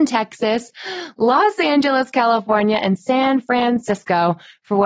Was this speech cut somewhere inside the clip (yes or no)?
no